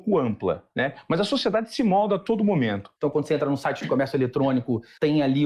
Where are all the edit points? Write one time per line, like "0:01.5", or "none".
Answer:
0:03.0